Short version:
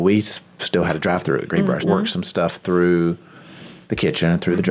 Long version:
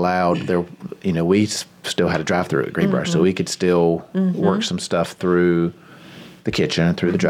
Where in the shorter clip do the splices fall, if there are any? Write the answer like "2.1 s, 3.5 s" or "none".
1.8 s